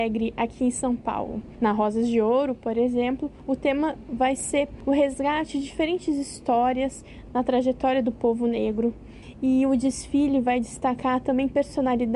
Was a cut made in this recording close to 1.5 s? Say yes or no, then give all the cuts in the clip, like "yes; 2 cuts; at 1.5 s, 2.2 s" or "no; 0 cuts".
no; 0 cuts